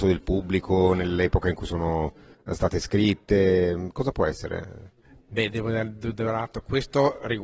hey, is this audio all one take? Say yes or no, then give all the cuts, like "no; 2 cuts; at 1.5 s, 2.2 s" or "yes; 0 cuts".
yes; 0 cuts